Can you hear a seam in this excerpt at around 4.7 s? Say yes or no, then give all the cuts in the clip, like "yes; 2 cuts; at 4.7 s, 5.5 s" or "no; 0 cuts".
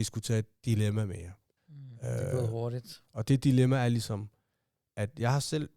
no; 2 cuts; at 1.6 s, 3.1 s